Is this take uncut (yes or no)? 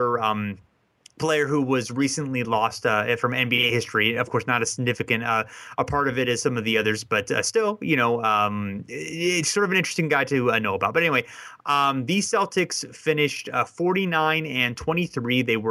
yes